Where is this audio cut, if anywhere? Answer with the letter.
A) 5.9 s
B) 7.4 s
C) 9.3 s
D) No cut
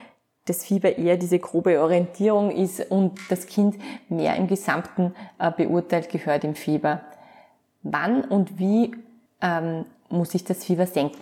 D